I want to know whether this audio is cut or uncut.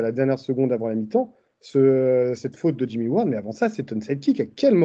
uncut